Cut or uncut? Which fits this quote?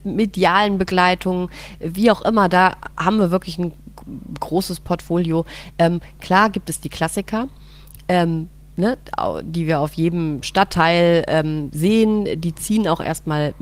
uncut